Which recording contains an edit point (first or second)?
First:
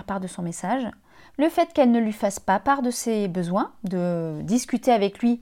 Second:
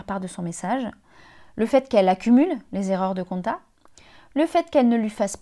first